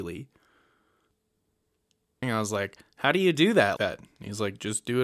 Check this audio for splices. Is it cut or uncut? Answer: cut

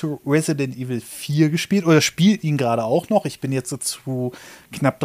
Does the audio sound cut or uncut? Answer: uncut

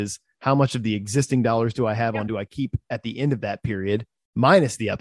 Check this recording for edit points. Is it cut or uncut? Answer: cut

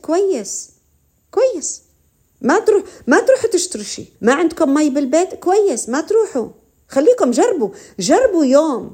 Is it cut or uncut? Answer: cut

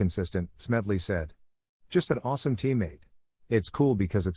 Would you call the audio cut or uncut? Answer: cut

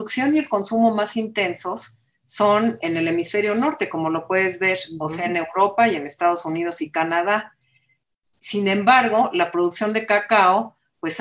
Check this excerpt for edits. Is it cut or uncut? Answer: uncut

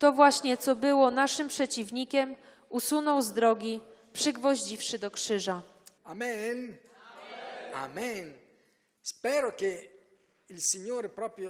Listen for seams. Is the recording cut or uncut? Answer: cut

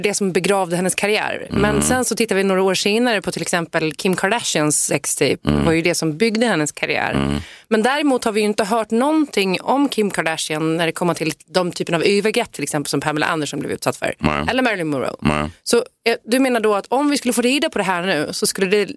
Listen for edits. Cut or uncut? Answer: uncut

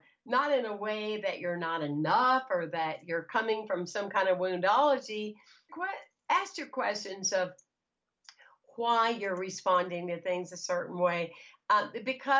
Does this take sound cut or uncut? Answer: cut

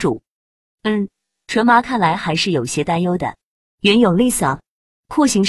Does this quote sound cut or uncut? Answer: uncut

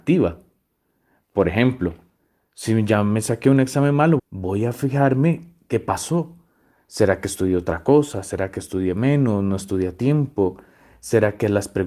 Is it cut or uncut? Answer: cut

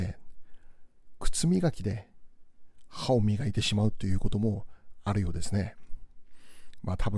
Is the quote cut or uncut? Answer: uncut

